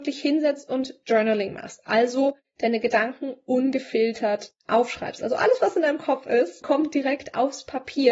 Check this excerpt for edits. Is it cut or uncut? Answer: cut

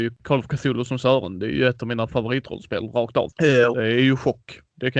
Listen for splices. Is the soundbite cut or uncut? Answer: cut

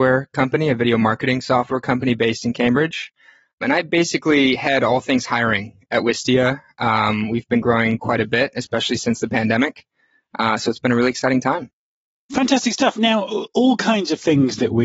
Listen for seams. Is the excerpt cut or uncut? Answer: uncut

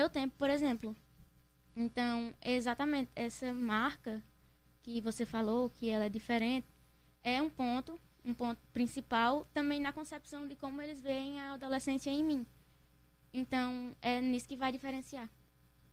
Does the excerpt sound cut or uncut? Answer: uncut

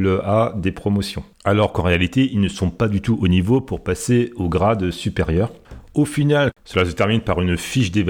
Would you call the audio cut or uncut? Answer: cut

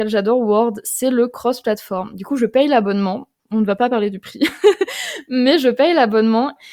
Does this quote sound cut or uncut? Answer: uncut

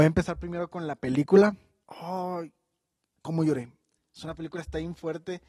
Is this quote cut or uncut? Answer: cut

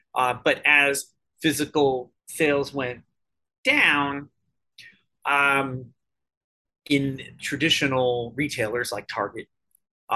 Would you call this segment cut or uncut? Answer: cut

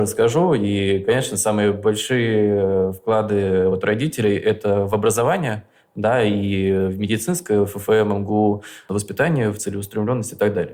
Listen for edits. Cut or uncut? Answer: uncut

